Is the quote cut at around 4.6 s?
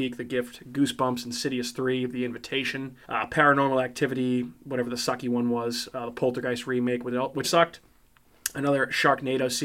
no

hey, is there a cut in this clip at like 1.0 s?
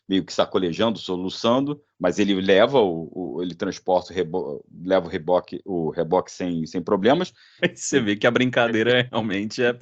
no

